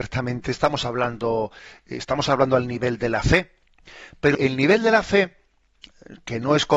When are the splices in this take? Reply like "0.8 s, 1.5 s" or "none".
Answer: 4.3 s